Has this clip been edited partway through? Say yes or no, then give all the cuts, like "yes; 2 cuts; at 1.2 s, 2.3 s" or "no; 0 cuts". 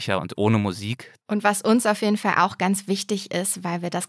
yes; 1 cut; at 1.2 s